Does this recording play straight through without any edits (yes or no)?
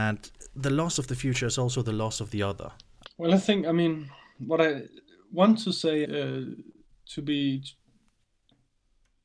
no